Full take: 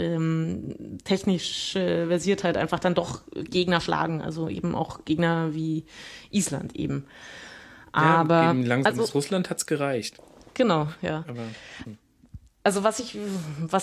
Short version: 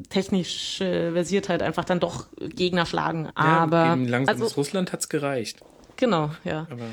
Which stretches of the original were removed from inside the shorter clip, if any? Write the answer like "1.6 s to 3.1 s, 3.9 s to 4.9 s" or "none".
4.2 s to 7.8 s